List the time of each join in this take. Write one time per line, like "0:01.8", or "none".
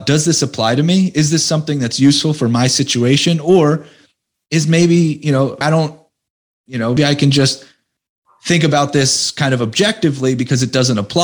0:05.6
0:07.0

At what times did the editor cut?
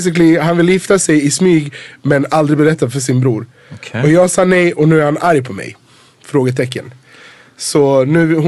none

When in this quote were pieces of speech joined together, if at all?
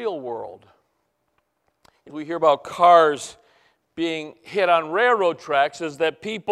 0:02.1

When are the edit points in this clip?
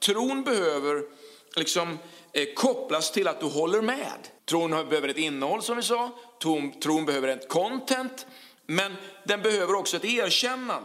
0:04.4

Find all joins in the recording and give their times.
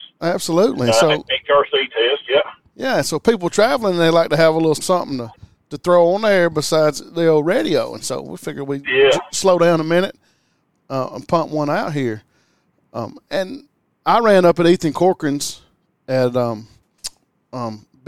0:04.7

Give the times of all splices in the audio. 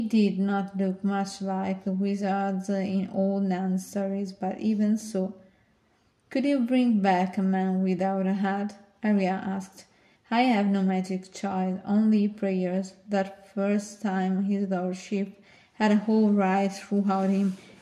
0:10.2

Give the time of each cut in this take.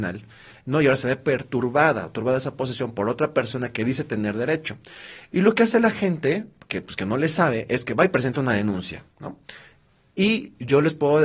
0:09.1

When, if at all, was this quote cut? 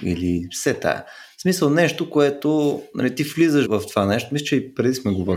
0:03.7

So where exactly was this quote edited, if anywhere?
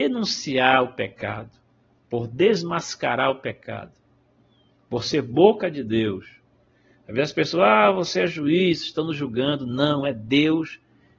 none

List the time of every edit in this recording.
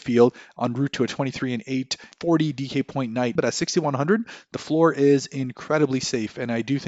0:02.1
0:03.4

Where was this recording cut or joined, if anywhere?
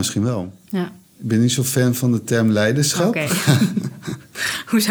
0:01.0

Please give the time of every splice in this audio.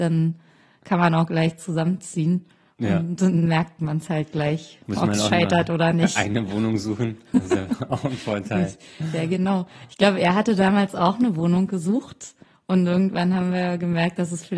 0:04.8

